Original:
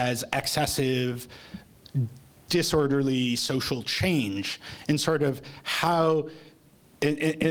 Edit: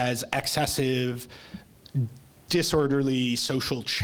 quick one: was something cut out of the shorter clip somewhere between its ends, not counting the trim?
no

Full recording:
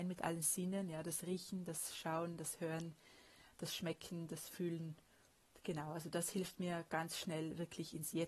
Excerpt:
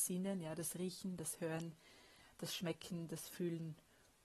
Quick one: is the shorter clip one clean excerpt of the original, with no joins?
no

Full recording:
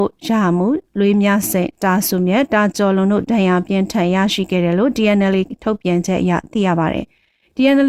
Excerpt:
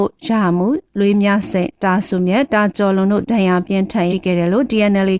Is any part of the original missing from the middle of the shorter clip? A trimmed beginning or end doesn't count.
yes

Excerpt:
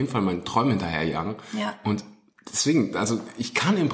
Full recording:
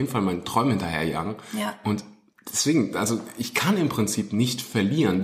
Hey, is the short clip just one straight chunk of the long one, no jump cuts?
yes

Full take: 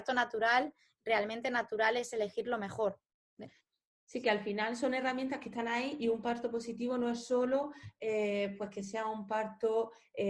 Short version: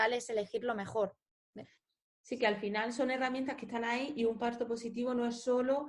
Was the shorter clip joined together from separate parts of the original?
no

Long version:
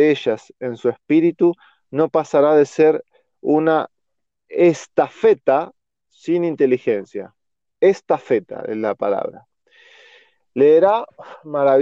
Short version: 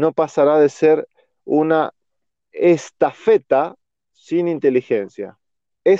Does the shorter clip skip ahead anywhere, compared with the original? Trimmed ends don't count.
no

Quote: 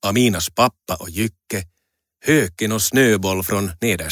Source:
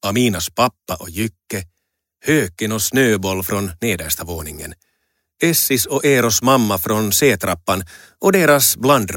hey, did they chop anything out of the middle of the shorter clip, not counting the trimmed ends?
no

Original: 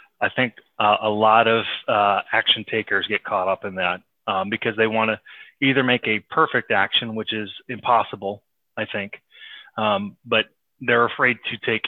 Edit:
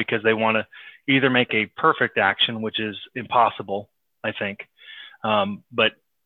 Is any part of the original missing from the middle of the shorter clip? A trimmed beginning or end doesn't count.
no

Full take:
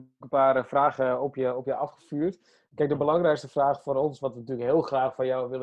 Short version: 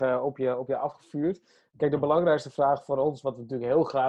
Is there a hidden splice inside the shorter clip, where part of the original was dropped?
no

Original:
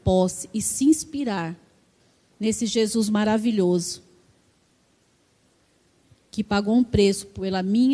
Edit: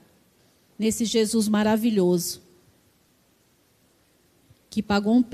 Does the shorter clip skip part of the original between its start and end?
no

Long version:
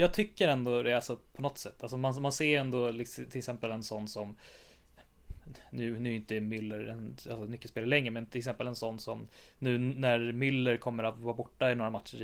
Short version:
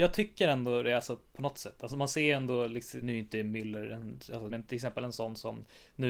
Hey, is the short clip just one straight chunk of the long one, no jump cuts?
no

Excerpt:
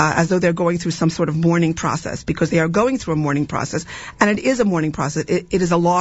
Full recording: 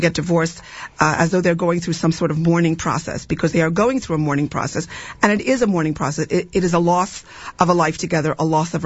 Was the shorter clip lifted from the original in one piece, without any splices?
yes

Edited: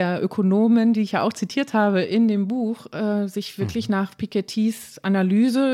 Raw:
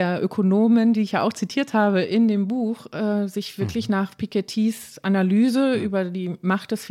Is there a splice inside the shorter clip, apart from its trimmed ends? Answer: no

